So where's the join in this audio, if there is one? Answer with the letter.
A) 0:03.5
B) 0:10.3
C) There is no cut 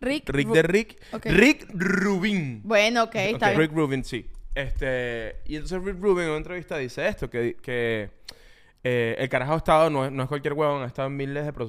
A